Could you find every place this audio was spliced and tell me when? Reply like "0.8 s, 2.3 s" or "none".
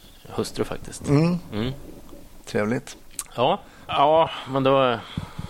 3.9 s

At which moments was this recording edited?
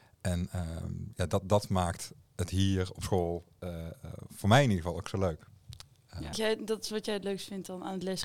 6.3 s

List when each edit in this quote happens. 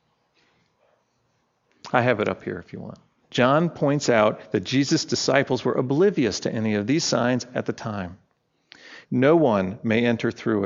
3.2 s, 9.0 s

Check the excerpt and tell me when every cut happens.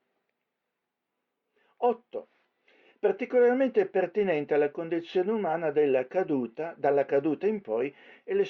none

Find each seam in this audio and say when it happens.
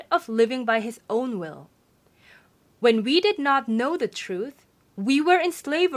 none

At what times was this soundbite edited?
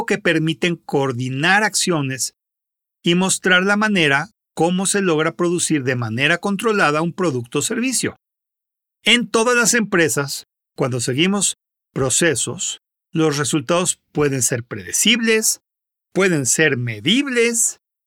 none

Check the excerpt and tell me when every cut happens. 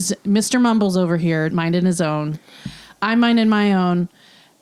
1.5 s

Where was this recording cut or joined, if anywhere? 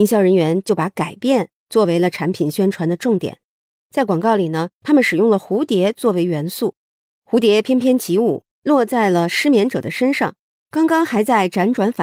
none

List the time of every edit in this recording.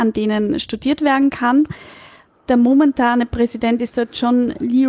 none

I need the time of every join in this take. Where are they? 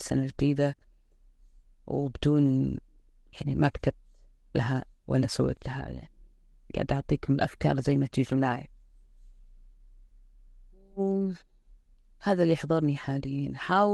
none

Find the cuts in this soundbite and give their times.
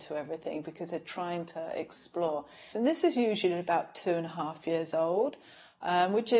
2.7 s

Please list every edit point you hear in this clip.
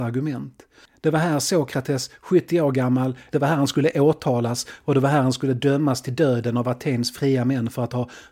3.3 s

